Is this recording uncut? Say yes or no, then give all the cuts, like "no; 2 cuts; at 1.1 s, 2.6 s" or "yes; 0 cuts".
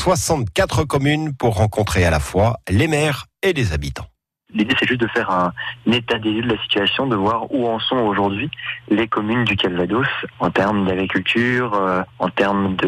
yes; 0 cuts